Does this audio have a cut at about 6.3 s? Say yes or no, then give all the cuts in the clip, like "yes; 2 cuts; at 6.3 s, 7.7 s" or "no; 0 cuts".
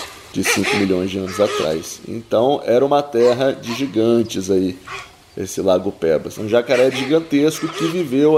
yes; 1 cut; at 6.3 s